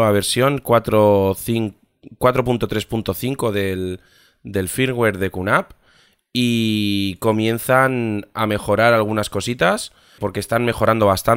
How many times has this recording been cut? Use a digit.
1